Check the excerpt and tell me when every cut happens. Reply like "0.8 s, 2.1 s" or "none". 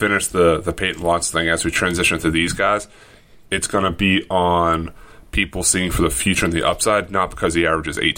3.5 s